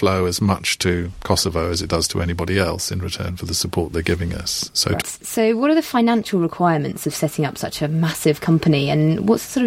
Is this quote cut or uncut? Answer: cut